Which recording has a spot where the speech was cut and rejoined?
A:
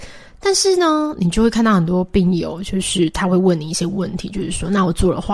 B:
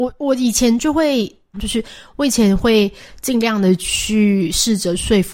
B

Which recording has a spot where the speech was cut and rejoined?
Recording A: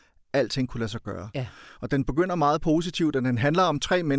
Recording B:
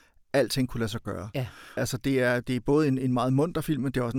B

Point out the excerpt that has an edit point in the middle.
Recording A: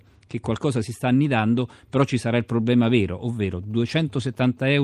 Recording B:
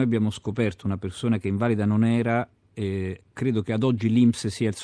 B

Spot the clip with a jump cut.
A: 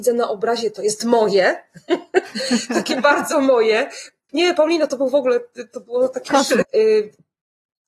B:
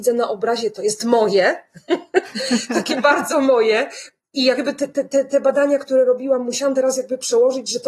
A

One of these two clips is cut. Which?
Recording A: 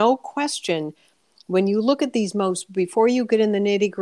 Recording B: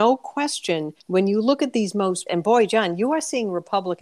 B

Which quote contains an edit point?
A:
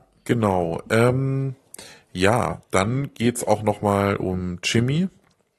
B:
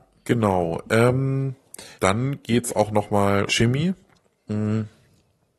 B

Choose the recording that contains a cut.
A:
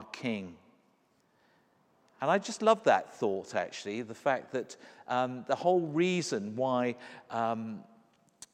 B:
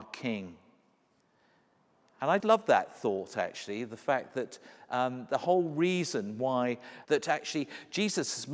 B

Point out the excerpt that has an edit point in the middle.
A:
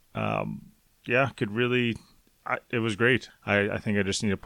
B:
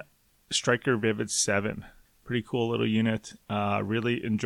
A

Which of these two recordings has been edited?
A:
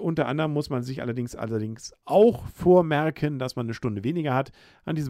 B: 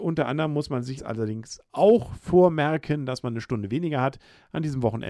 B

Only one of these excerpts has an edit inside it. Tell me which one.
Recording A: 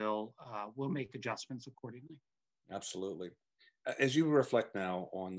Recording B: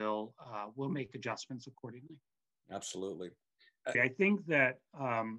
B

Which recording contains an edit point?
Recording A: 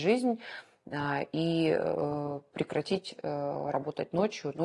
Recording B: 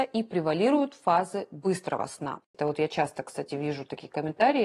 B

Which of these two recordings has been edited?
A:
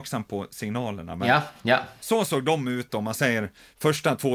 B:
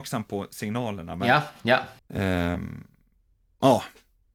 B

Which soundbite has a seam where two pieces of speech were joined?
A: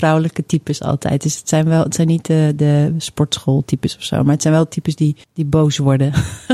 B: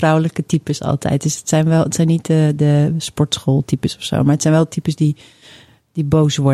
A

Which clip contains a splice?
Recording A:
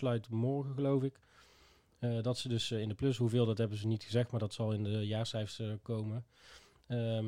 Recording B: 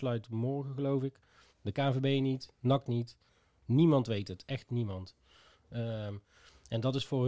B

